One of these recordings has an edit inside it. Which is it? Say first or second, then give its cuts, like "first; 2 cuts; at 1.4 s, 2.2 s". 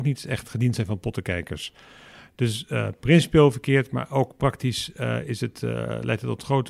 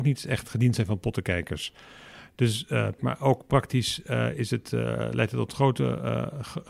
second; 1 cut; at 3.0 s